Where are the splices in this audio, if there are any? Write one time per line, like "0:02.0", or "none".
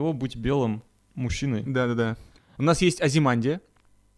0:02.5